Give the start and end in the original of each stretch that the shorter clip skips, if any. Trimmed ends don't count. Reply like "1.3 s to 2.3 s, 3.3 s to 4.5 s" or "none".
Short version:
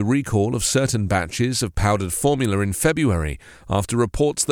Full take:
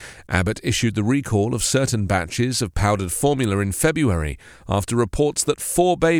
none